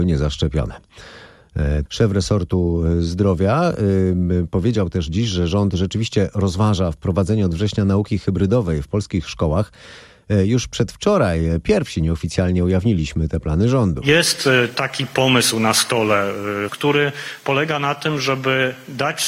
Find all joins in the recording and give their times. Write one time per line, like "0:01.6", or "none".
0:01.9
0:16.7